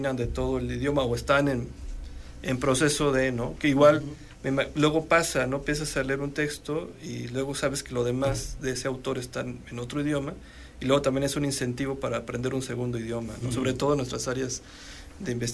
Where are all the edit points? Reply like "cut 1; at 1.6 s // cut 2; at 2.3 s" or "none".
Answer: none